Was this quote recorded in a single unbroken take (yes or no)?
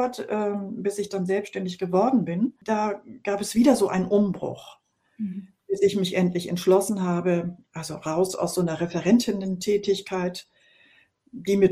yes